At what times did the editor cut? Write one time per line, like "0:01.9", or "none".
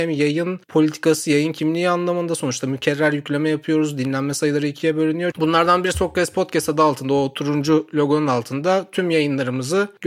0:05.3